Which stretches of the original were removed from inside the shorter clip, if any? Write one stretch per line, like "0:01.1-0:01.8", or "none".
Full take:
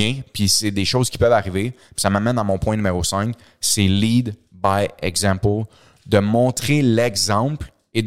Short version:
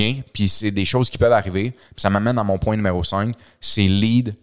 none